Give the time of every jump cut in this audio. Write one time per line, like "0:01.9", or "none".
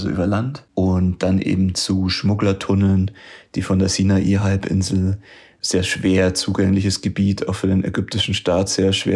none